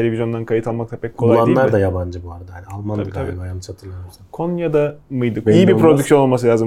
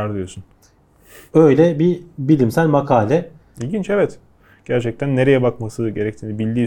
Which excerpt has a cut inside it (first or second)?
first